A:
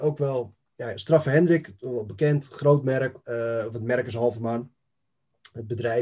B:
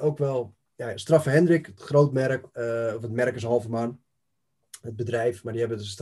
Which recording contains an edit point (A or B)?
B